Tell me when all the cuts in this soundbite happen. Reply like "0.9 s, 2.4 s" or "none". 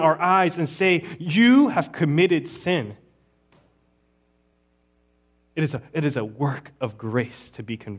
none